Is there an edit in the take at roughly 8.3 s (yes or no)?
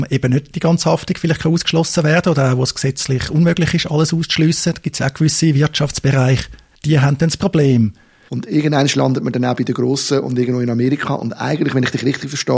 yes